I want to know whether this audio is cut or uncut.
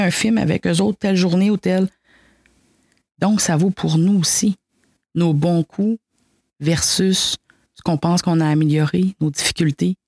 uncut